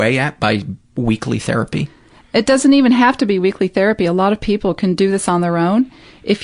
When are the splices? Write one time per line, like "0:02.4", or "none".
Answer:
none

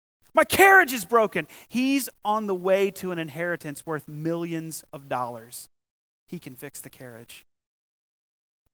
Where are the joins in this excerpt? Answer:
none

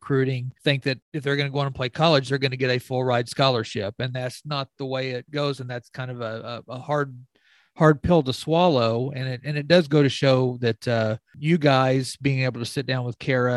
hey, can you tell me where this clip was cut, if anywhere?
none

